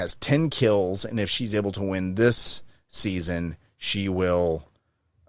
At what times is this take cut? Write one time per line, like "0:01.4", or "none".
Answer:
none